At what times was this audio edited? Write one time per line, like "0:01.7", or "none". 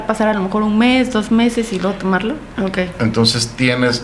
0:02.6